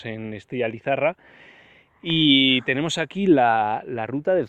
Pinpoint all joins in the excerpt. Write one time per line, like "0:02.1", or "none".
none

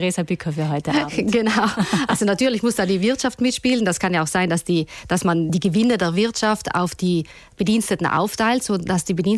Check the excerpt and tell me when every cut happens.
none

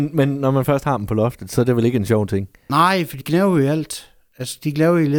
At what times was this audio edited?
0:03.2

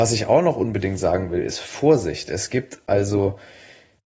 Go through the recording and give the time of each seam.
none

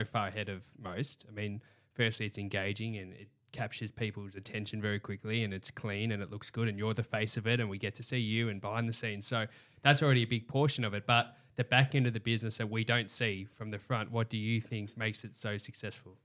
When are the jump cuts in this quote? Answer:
none

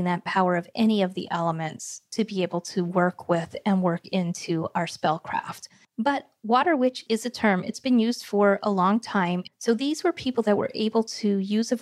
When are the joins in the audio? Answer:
0:09.5

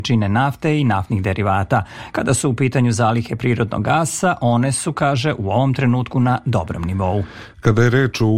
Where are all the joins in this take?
none

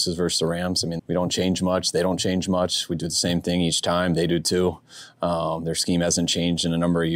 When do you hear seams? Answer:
0:01.0

